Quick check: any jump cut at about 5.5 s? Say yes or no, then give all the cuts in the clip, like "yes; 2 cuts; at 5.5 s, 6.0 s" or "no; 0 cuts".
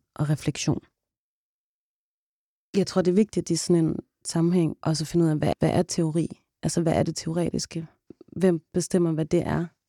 yes; 1 cut; at 5.5 s